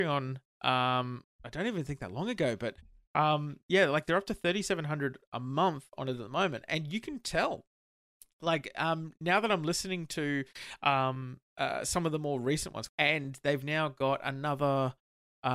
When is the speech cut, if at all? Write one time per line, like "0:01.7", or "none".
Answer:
0:01.2
0:12.9